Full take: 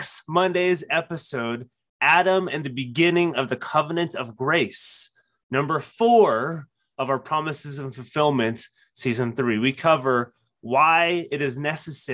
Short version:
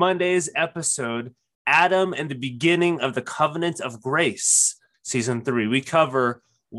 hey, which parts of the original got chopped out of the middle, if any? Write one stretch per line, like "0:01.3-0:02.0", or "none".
0:05.3-0:08.9